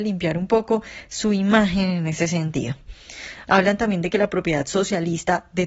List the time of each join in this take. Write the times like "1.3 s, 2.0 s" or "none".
3.4 s